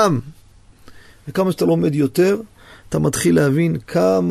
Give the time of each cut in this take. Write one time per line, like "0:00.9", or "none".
none